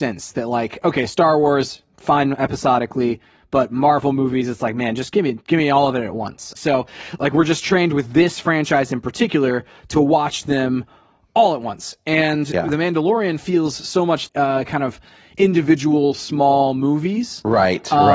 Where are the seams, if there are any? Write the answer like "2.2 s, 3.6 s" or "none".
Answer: 6.6 s, 14.3 s